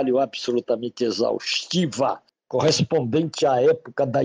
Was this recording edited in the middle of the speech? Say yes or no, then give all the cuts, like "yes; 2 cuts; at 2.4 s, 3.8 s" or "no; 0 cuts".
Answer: no; 0 cuts